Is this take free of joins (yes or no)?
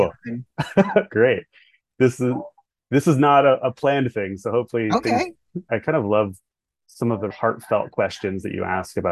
no